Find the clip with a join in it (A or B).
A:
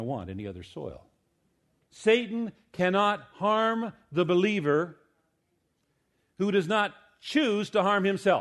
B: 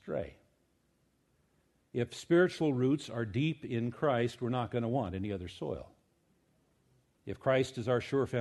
A